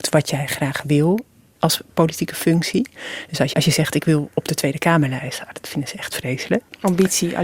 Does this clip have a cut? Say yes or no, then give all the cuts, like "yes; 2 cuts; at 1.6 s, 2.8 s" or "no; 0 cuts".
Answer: yes; 1 cut; at 3.5 s